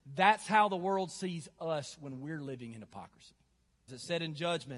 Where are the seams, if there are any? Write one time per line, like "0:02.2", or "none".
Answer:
0:03.9